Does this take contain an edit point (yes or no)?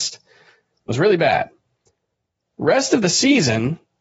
no